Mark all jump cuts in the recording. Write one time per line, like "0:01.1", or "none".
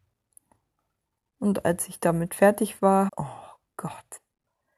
0:03.1